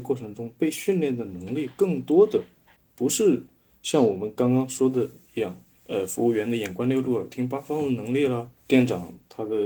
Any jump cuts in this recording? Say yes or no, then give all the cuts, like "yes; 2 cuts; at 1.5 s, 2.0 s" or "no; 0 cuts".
yes; 1 cut; at 8.6 s